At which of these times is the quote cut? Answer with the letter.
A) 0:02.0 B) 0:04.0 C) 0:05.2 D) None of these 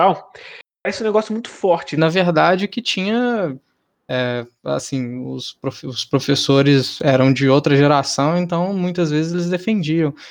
A